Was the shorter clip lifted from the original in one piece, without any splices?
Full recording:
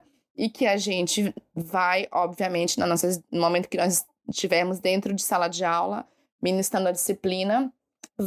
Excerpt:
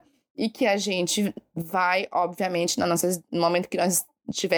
yes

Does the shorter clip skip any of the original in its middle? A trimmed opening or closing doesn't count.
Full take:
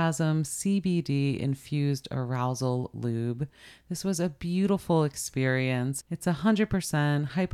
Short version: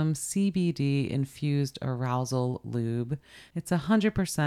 yes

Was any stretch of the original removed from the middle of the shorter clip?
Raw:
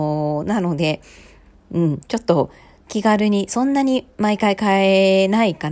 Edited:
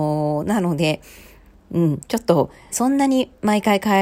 yes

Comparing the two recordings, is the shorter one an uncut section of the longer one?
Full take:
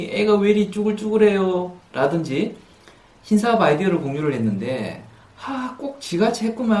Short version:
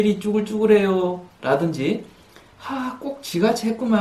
no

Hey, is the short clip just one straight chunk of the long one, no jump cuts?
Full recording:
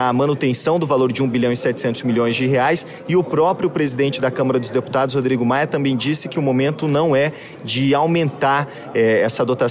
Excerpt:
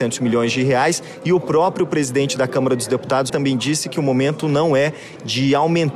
no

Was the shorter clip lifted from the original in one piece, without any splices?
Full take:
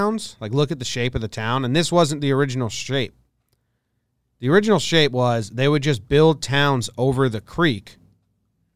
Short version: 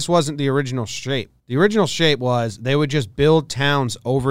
no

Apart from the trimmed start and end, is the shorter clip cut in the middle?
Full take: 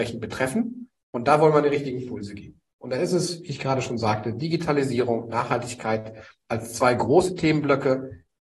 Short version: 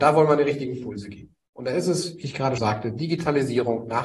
yes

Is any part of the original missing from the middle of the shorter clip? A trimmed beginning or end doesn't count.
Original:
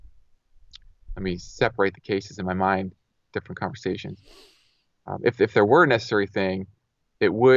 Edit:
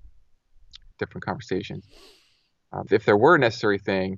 yes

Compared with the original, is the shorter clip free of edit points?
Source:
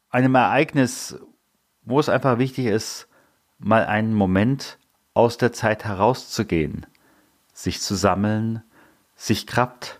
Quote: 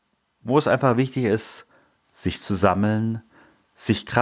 no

